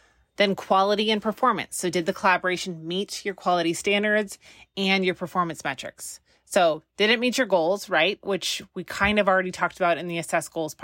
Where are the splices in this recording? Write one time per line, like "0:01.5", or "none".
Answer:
none